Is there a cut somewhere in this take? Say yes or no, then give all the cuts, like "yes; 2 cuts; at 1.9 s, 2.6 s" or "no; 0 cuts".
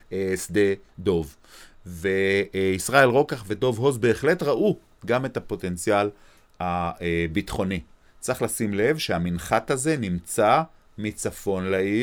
no; 0 cuts